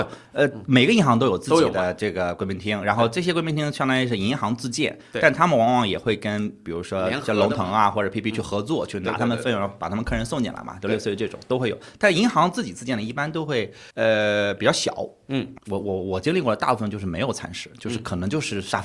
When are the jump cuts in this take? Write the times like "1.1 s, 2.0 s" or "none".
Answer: 13.9 s, 15.6 s